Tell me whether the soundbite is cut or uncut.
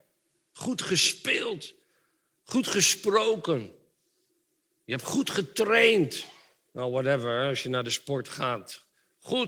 uncut